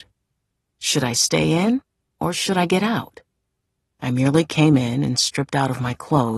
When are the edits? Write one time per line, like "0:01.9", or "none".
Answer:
0:03.8